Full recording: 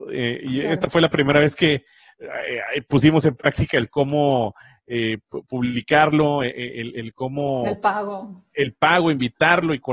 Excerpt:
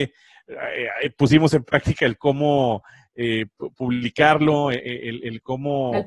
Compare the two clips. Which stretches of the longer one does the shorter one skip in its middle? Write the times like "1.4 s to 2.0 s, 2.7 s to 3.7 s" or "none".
none